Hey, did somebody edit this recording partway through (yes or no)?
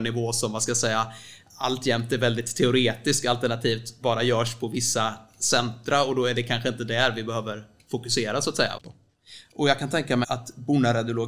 yes